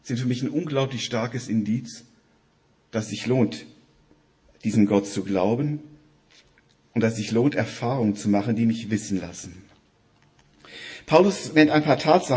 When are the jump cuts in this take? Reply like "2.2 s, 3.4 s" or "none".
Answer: none